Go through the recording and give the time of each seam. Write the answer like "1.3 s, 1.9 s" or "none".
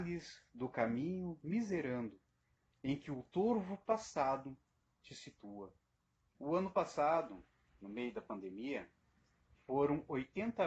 6.3 s